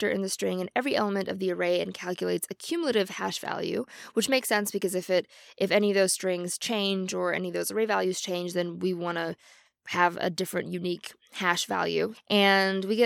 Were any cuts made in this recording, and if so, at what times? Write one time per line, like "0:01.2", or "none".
0:12.1